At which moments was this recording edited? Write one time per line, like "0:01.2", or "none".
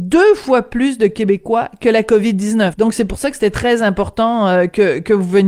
0:02.7